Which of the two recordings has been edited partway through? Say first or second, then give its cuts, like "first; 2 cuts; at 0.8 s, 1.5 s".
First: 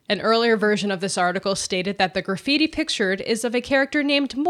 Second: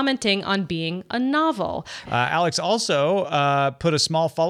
second; 1 cut; at 2.1 s